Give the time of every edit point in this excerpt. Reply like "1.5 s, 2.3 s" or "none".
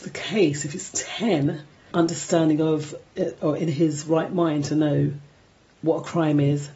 1.9 s